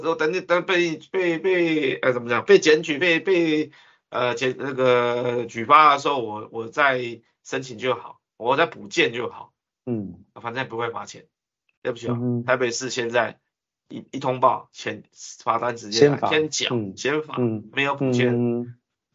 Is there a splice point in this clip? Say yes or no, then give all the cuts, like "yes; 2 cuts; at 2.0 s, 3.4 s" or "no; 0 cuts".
no; 0 cuts